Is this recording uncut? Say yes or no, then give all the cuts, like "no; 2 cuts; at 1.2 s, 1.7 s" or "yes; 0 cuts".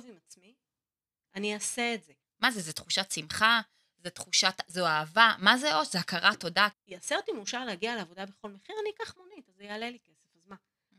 no; 3 cuts; at 2.2 s, 3.8 s, 6.7 s